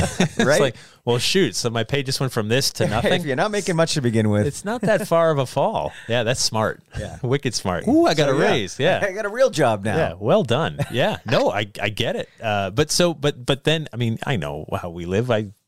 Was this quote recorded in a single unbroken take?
no; 1 cut; at 7.8 s

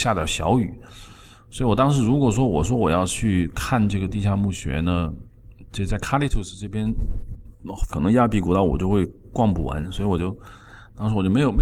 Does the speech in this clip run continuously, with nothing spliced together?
no; 1 cut; at 7.9 s

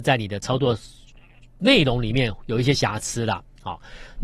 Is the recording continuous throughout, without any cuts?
yes; 0 cuts

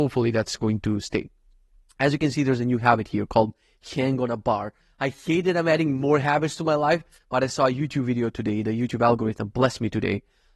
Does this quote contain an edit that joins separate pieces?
no; 0 cuts

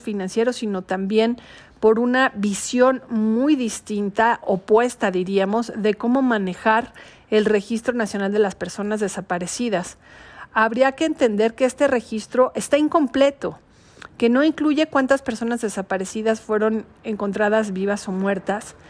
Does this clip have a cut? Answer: no; 0 cuts

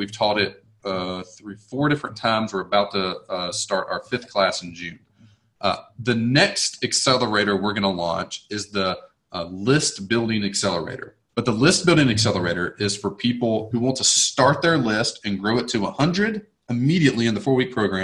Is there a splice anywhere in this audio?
yes; 2 cuts; at 11.3 s, 13.7 s

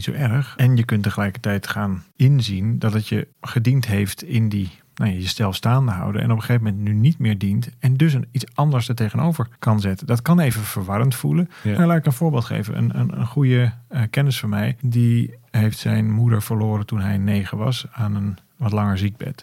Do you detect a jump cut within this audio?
no; 0 cuts

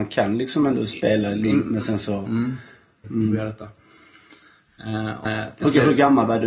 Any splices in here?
yes; 2 cuts; at 3.0 s, 5.2 s

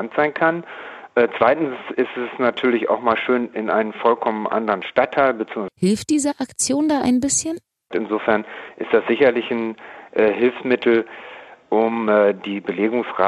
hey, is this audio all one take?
no; 2 cuts; at 5.7 s, 7.9 s

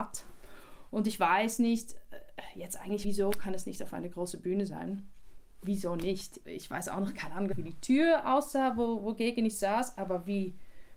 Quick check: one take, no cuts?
no; 3 cuts; at 3.0 s, 6.4 s, 7.5 s

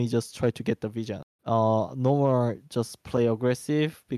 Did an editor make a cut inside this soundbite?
yes; 1 cut; at 1.2 s

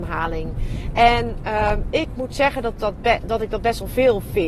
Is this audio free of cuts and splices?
yes; 0 cuts

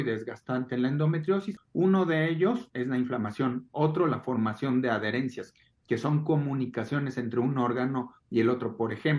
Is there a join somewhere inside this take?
yes; 1 cut; at 1.6 s

